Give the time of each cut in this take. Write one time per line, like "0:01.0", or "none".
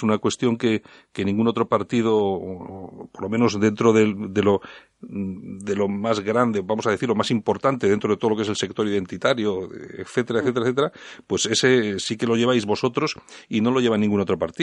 none